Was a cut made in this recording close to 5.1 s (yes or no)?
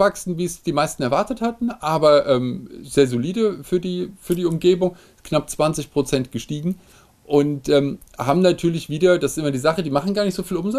no